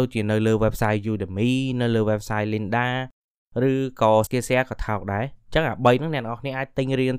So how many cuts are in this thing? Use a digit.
1